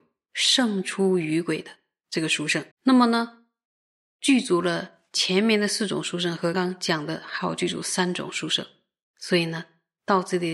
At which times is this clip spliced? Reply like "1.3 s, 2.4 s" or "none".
2.7 s, 6.5 s